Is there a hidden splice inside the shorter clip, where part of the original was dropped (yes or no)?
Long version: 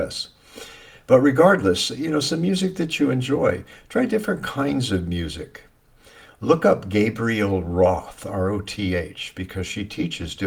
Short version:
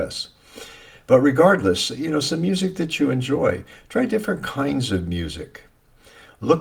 no